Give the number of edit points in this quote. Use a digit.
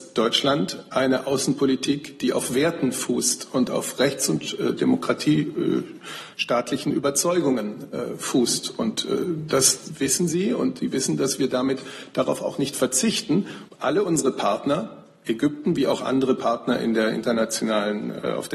1